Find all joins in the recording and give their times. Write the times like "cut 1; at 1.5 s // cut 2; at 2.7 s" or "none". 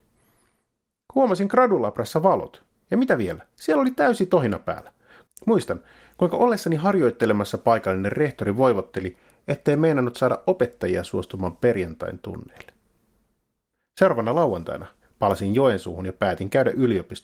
cut 1; at 5.3 s